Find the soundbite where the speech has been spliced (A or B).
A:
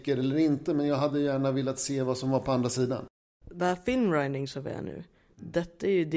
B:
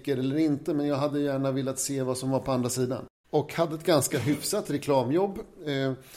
B